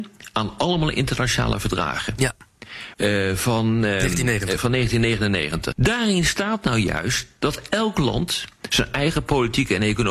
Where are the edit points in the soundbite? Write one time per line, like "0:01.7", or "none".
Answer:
0:02.9
0:05.7